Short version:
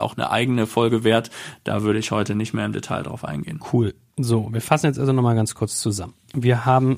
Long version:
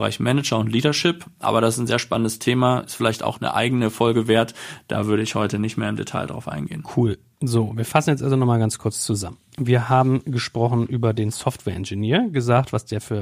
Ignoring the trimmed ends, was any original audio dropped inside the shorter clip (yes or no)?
no